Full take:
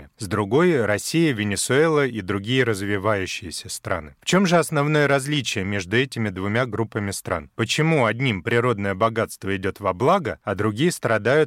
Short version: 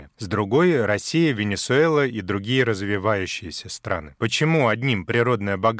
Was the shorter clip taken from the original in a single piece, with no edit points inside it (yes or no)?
no